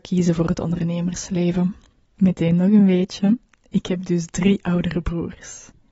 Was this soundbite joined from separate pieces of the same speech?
yes; 1 cut; at 2.0 s

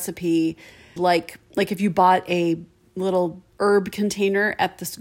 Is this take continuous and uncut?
no; 2 cuts; at 1.0 s, 3.5 s

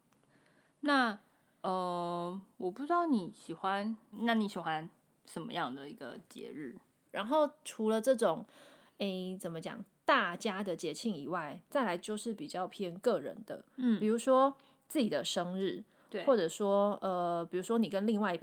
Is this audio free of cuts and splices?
no; 2 cuts; at 4.1 s, 7.1 s

